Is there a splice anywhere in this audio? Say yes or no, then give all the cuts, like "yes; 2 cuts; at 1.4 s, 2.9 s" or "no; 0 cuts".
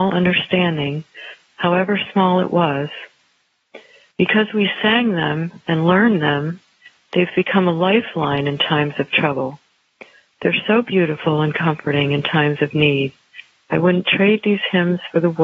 yes; 1 cut; at 4.1 s